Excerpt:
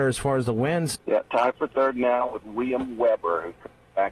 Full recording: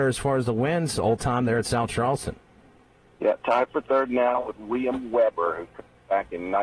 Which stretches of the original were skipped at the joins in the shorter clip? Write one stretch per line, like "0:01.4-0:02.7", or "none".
0:00.9-0:03.1